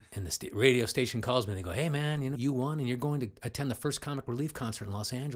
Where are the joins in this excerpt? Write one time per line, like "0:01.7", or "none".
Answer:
0:02.3